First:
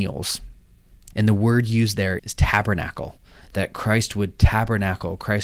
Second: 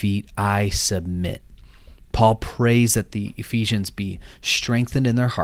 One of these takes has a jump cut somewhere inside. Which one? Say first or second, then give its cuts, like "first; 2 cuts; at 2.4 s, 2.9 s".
first; 2 cuts; at 1.1 s, 2.2 s